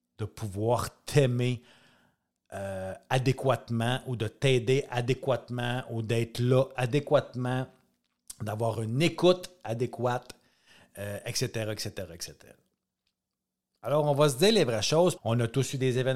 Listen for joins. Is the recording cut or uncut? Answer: cut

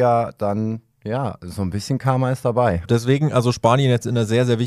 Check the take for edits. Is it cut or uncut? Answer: cut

